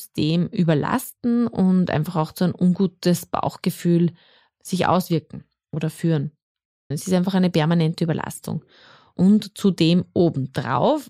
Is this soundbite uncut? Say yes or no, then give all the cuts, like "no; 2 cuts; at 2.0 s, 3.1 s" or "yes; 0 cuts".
no; 1 cut; at 6.9 s